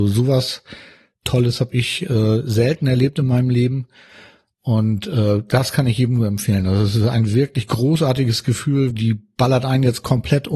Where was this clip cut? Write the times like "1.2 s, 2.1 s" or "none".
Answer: 8.9 s